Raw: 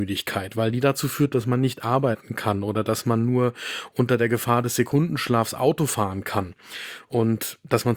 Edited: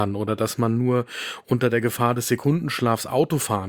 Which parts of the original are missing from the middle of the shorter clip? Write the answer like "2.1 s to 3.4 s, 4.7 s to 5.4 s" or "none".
none